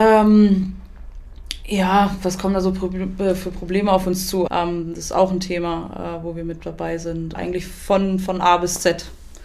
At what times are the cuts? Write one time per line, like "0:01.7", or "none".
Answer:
0:04.5
0:07.3